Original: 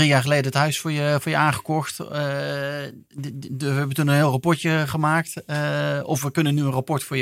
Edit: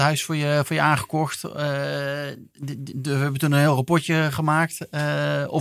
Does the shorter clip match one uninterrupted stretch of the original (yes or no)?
yes